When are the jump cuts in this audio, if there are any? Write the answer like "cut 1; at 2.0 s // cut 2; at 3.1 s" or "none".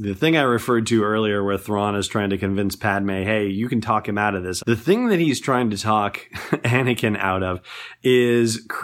cut 1; at 4.6 s